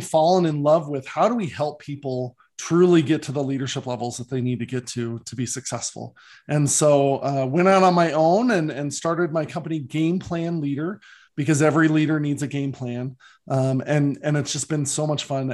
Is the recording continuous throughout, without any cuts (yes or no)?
yes